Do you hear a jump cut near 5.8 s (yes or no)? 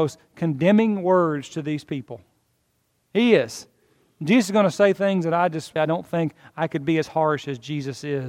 yes